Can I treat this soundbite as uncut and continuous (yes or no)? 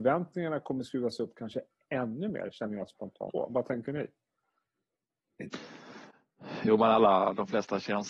no